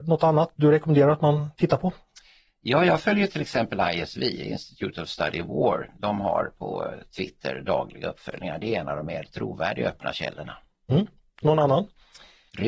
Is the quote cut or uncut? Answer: uncut